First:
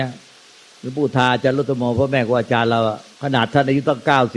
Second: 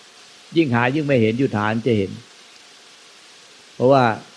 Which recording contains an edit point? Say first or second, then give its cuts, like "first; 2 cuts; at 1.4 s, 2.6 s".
first; 1 cut; at 3.1 s